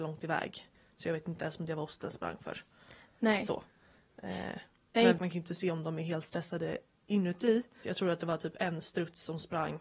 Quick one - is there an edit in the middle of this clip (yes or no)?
yes